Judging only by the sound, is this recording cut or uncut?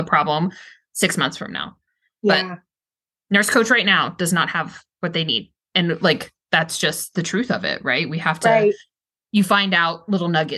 uncut